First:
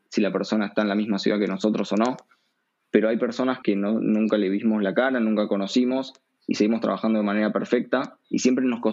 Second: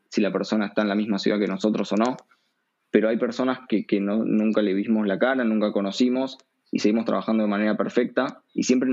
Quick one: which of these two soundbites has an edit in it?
first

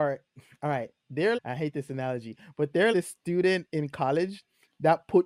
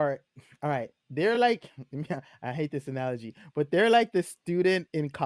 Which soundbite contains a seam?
first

